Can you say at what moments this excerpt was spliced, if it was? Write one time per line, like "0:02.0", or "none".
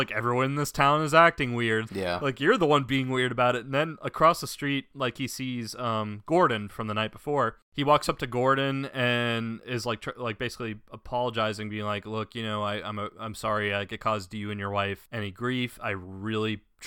0:01.9